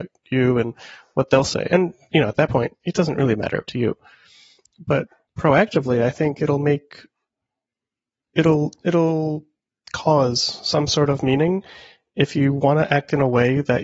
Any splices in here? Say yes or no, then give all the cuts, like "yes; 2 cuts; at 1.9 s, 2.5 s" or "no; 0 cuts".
no; 0 cuts